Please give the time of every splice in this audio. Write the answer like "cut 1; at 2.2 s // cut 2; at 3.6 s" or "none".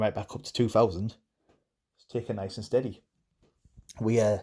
none